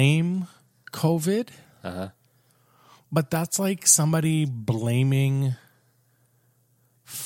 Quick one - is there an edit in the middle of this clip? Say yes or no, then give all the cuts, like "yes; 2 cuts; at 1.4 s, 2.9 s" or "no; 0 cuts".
no; 0 cuts